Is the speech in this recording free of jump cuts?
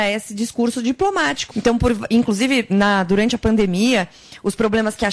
no; 1 cut; at 1.5 s

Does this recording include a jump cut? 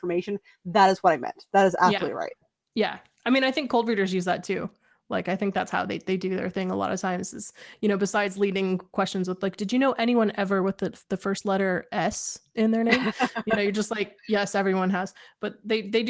no; 0 cuts

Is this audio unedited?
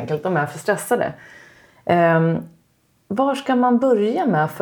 yes; 0 cuts

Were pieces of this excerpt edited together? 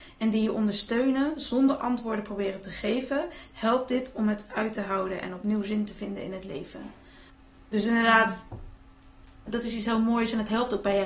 yes; 1 cut; at 9.5 s

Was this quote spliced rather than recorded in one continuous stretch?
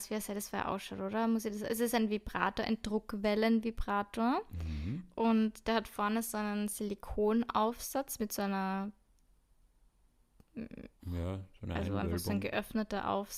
yes; 1 cut; at 11.0 s

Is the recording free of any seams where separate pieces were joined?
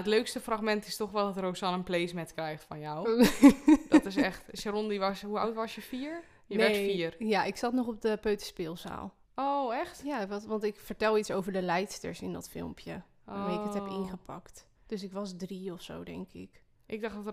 no; 2 cuts; at 9.2 s, 14.7 s

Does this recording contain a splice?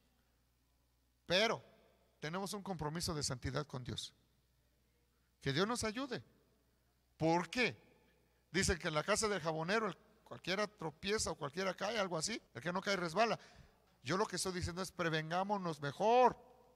yes; 2 cuts; at 12.5 s, 13.9 s

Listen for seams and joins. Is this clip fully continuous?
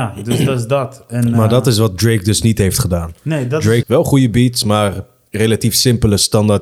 no; 1 cut; at 3.8 s

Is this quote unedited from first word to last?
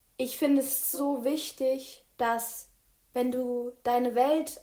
no; 2 cuts; at 0.9 s, 2.1 s

